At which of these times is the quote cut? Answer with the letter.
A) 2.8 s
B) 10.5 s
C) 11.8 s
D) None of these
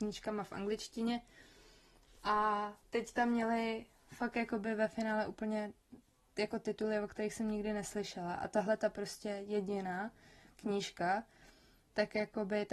A